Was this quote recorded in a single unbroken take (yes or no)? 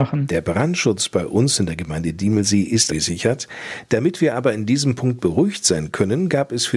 no